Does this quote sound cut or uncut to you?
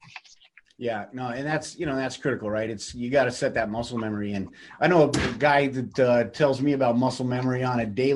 uncut